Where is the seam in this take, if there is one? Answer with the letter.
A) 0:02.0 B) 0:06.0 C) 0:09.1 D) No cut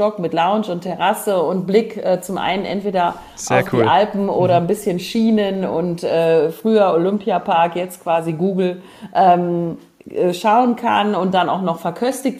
D